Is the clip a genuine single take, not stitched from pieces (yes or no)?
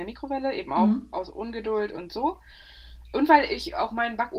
yes